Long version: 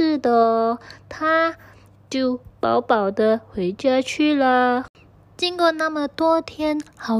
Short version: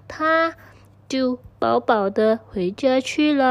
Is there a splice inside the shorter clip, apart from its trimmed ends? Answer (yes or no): no